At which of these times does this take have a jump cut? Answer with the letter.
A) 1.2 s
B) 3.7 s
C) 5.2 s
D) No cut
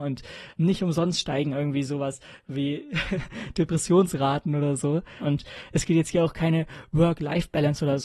C